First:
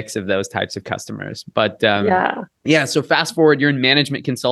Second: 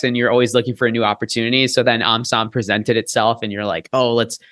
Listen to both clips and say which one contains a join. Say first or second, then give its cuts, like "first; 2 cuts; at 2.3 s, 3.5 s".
first; 1 cut; at 2.5 s